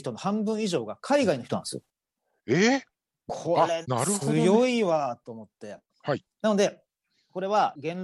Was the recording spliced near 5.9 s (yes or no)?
yes